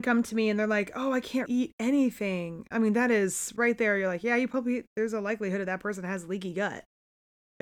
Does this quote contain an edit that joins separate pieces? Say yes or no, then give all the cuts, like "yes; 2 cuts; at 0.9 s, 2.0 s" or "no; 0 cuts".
yes; 1 cut; at 1.5 s